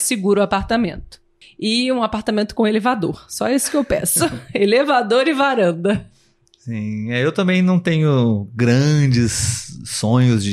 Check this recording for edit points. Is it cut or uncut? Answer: cut